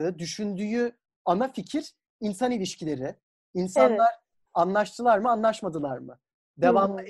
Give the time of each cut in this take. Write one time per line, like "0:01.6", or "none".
0:04.3

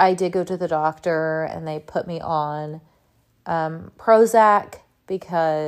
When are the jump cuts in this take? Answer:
none

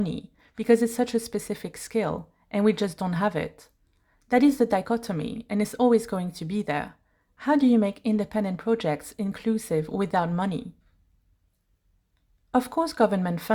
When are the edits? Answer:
none

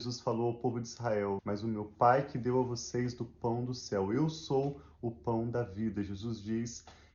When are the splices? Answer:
0:01.4

